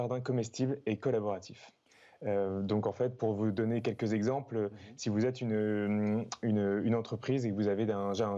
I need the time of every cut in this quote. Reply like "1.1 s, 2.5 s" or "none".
none